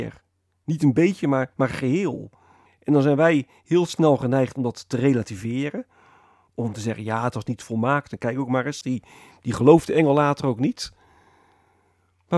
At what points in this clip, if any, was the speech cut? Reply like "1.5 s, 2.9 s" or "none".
2.7 s, 8.8 s